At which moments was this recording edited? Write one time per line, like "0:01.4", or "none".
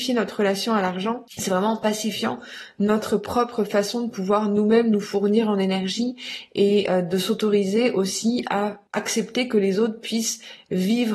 0:01.3
0:08.9